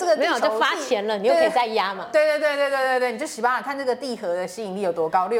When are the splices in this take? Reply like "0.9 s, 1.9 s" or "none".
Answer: none